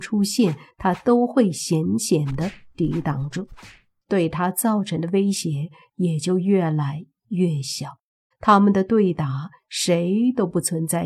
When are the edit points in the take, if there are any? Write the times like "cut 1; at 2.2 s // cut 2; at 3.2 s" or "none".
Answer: cut 1; at 4.0 s // cut 2; at 8.3 s